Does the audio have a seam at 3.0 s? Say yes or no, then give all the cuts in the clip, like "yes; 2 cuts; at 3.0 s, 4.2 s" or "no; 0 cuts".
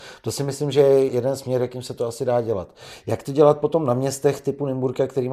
no; 1 cut; at 1.1 s